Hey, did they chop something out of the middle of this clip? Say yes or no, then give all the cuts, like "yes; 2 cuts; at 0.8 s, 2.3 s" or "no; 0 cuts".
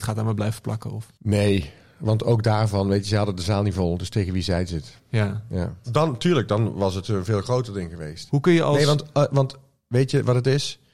yes; 2 cuts; at 5.8 s, 8.3 s